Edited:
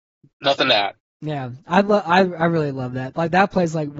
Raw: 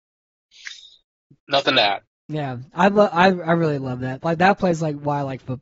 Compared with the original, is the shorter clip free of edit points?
yes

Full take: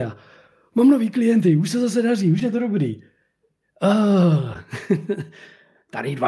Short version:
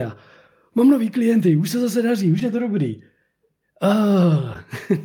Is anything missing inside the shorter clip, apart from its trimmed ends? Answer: no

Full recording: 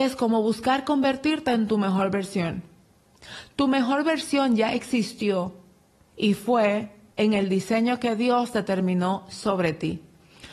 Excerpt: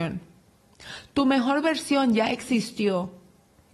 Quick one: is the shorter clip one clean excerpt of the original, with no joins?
yes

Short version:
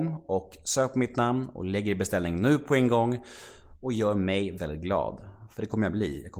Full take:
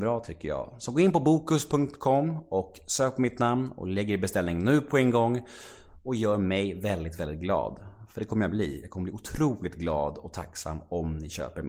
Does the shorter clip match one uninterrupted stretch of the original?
no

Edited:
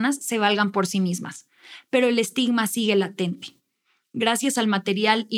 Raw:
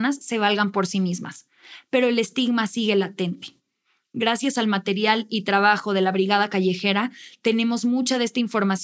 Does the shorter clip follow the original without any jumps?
yes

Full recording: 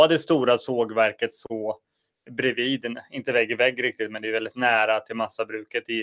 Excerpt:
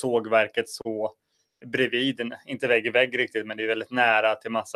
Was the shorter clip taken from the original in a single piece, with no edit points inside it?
yes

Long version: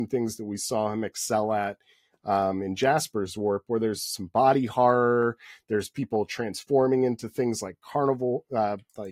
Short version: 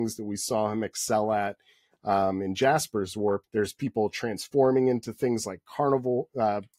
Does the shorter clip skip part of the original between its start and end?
yes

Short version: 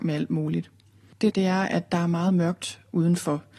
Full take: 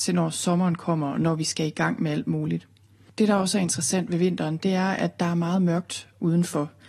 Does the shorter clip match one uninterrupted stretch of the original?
no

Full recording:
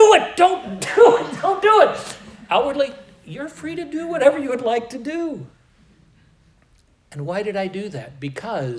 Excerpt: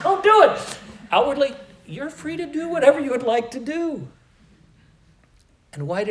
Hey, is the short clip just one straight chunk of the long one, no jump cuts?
yes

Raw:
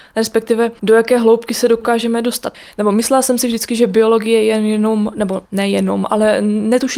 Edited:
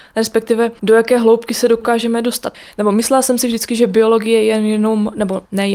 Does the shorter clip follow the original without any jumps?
yes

